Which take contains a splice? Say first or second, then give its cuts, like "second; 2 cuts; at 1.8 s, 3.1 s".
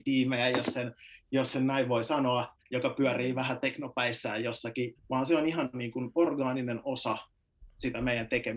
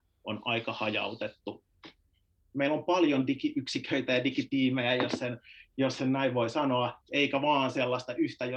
first; 2 cuts; at 2.6 s, 5.0 s